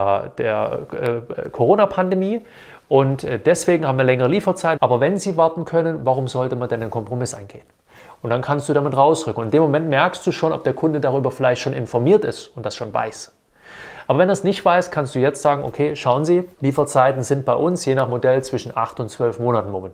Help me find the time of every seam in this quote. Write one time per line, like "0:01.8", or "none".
0:04.8
0:08.2
0:16.5